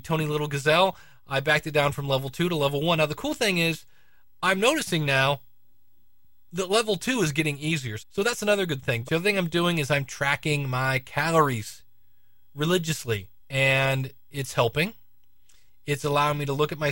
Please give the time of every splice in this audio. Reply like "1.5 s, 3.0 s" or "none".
8.0 s, 9.0 s, 13.4 s